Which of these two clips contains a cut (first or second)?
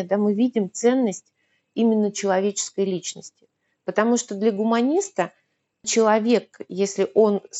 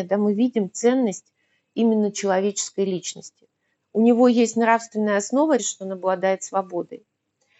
second